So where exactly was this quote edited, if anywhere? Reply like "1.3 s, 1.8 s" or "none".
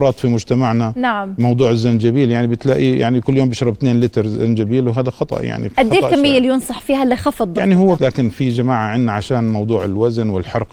8.0 s